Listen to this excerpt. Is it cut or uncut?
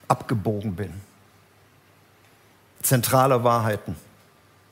cut